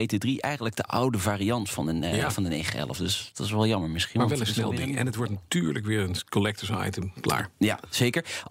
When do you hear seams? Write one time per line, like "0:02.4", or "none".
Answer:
none